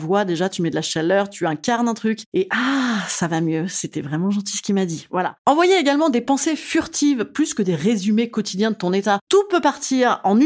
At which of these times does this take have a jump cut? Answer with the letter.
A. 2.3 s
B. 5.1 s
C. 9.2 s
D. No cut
C